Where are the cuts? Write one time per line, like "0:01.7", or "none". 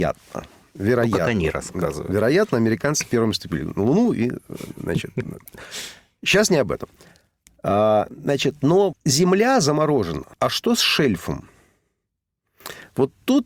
0:08.9
0:10.3